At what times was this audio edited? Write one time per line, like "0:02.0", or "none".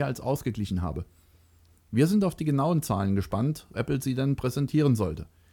0:03.7